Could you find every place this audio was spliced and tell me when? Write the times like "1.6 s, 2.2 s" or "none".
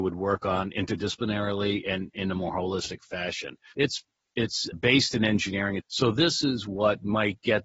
3.7 s, 4.7 s, 5.8 s